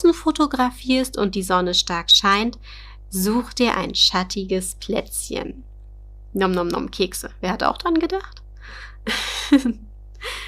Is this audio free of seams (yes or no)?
yes